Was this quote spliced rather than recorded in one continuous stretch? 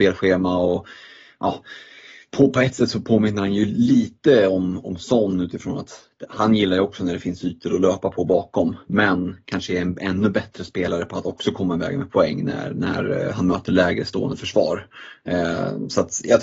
no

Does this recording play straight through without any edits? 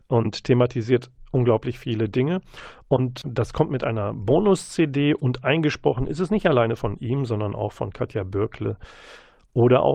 no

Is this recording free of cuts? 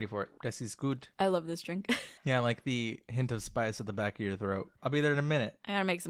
no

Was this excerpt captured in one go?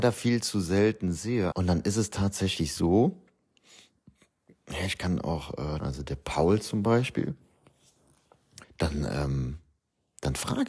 no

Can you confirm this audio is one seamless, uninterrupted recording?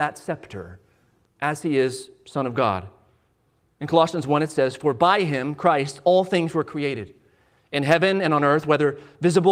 yes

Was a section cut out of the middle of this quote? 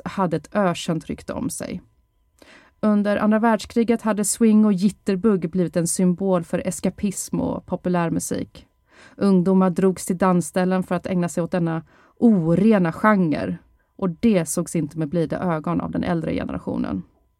no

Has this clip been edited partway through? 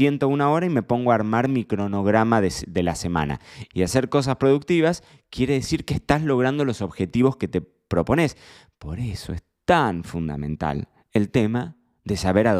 yes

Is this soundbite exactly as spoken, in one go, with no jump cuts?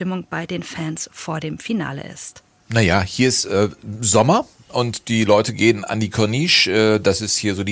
yes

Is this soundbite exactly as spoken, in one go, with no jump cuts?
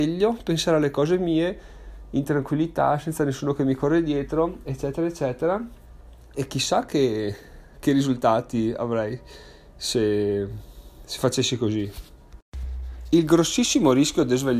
yes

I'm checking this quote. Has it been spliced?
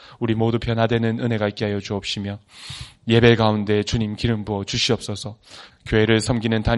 yes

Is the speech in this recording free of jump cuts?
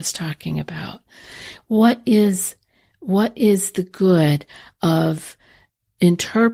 yes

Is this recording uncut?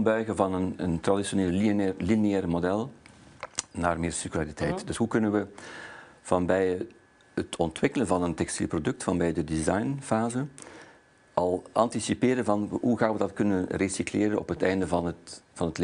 yes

